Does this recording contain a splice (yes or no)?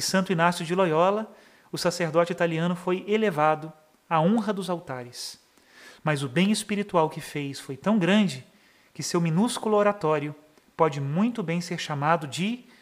yes